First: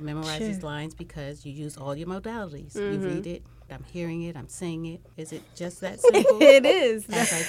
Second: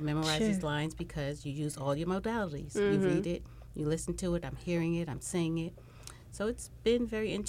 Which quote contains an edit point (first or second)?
first